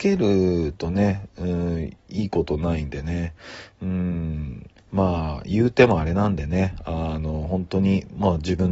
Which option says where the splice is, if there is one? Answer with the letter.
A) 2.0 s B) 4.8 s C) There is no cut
B